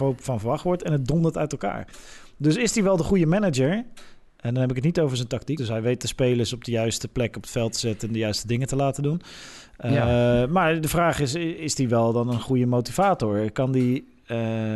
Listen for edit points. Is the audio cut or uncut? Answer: cut